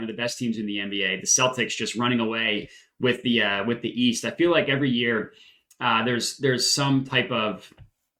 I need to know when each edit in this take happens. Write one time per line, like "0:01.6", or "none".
none

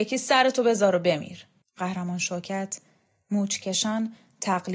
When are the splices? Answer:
0:01.6

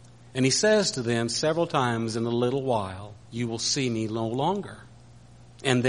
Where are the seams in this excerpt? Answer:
0:03.2

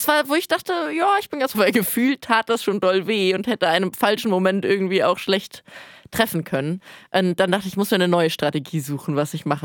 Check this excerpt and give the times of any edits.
0:01.5

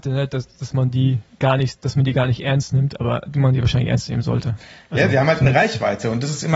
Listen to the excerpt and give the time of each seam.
none

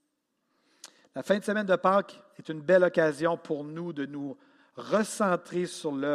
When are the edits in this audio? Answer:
none

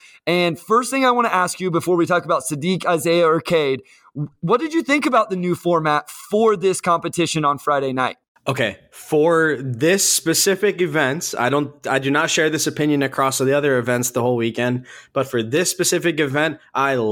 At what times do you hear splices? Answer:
none

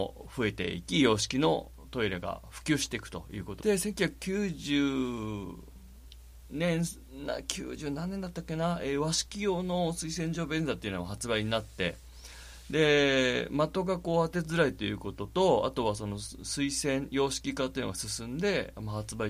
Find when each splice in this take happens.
0:03.6

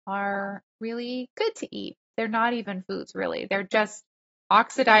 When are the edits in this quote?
0:02.1

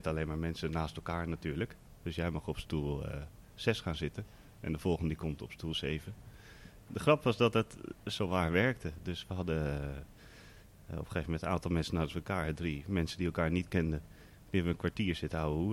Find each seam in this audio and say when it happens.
none

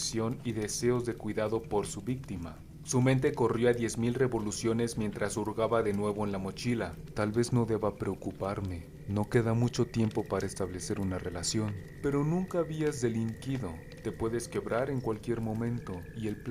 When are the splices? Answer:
none

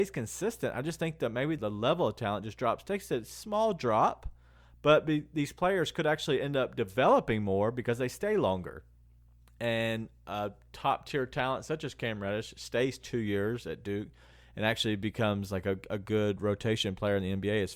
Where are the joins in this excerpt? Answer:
0:01.6

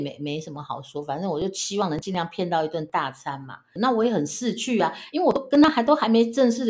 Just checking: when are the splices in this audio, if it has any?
0:03.8

